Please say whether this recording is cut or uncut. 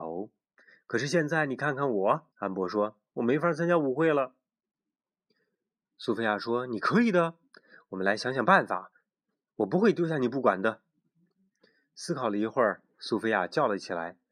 cut